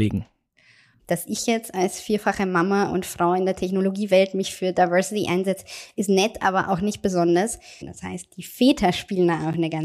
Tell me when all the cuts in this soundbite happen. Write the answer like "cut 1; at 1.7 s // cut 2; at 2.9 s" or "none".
cut 1; at 1.0 s // cut 2; at 7.8 s